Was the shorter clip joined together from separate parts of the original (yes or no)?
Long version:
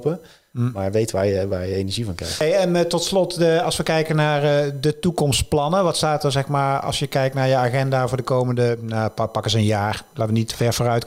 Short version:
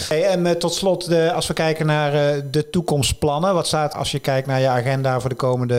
yes